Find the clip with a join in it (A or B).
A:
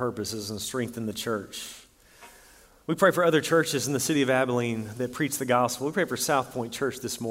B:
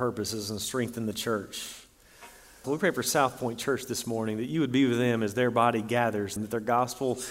B